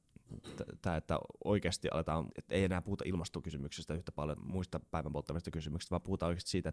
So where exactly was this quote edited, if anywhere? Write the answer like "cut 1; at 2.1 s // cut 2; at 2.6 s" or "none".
cut 1; at 2.3 s // cut 2; at 4.4 s